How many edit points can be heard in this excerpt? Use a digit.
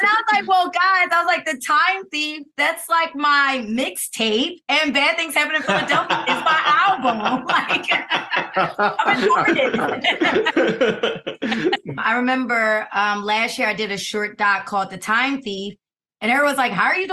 1